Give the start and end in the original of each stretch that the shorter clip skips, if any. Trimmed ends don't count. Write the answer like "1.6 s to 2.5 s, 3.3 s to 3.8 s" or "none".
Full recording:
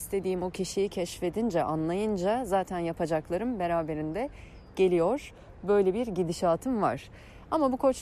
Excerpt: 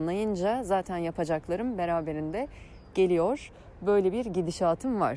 none